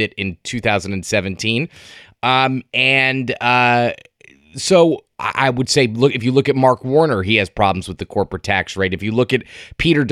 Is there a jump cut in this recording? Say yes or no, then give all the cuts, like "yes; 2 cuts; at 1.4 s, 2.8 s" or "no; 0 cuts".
no; 0 cuts